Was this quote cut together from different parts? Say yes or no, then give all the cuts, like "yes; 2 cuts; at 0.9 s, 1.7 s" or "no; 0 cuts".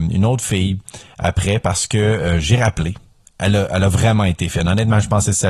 no; 0 cuts